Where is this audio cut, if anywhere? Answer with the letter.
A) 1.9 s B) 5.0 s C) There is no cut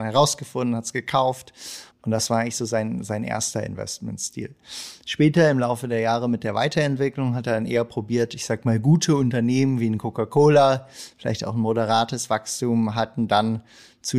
A